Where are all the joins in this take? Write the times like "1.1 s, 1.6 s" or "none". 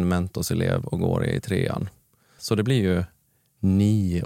2.4 s